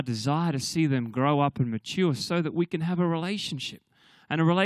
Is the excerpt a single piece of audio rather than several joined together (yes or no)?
yes